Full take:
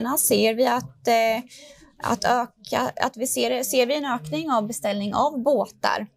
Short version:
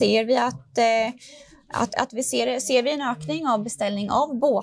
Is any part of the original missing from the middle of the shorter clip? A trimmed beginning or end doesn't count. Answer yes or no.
yes